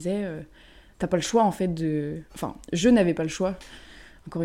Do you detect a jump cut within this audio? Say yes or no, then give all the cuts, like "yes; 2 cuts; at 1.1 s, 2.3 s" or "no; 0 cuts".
yes; 1 cut; at 2.3 s